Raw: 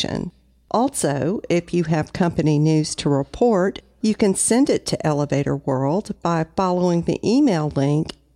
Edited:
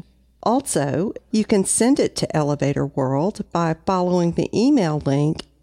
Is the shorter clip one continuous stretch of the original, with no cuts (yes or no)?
no